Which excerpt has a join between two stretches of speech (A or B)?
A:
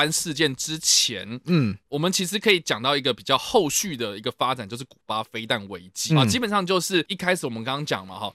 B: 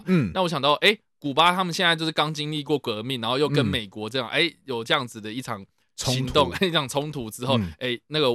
A